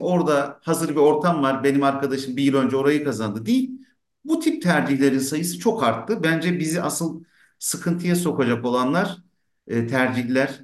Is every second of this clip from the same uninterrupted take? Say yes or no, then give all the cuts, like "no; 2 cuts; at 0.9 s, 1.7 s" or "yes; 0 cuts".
yes; 0 cuts